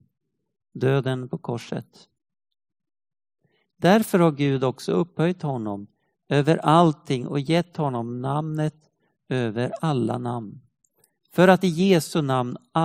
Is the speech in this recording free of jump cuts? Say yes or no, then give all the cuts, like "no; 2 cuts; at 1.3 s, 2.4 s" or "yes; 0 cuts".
yes; 0 cuts